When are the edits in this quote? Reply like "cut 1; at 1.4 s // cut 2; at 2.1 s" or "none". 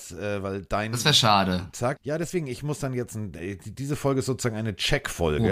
cut 1; at 2.0 s